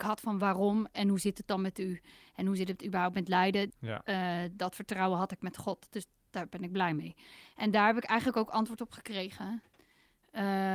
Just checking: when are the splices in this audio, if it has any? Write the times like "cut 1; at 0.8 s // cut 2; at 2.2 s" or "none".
cut 1; at 3.7 s